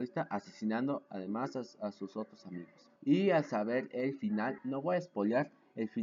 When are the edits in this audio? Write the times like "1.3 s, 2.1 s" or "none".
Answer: 3.0 s, 4.6 s